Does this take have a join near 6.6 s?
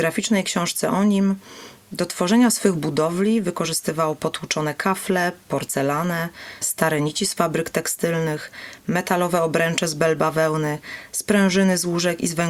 yes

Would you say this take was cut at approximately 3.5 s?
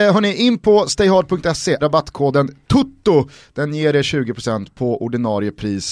no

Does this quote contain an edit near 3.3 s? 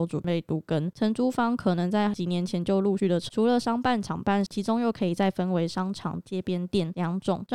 yes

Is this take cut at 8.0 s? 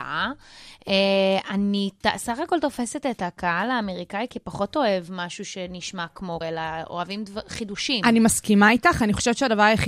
no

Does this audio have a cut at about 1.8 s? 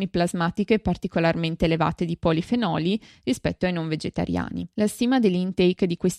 no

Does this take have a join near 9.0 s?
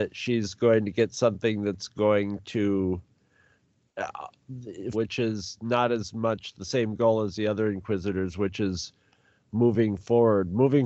no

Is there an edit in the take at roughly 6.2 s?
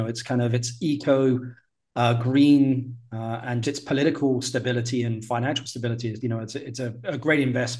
yes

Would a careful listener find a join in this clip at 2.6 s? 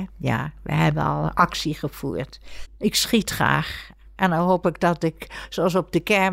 yes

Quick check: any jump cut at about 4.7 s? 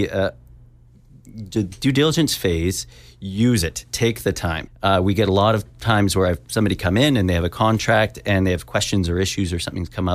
yes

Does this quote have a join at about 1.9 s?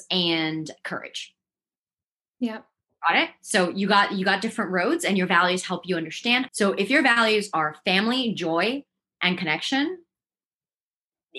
no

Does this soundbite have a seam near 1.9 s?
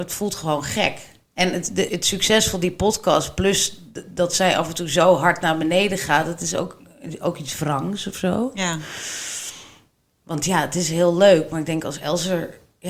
yes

